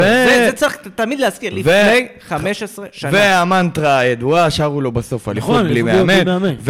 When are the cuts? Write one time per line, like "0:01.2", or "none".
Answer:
none